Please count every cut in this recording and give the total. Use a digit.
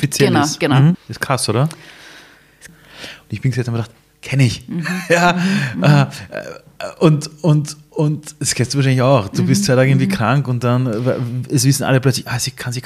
2